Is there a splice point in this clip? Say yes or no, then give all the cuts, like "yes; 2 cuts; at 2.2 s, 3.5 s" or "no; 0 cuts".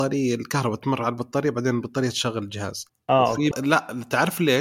yes; 1 cut; at 3.5 s